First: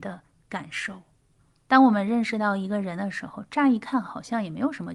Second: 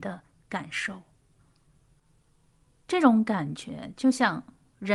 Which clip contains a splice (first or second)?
first